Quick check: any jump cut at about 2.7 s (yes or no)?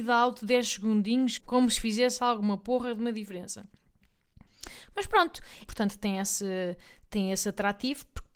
no